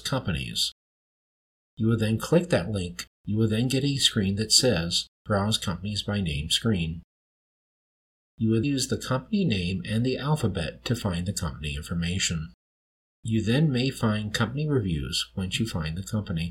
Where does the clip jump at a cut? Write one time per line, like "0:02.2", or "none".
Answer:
0:08.6